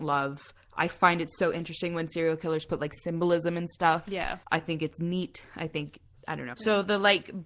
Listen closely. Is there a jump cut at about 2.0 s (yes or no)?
no